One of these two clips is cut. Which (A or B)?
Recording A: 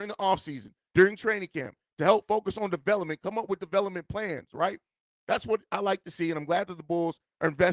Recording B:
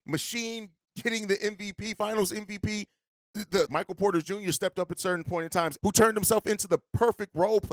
B